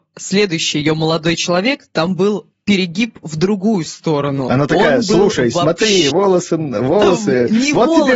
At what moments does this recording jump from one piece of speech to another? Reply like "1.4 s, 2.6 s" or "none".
6.1 s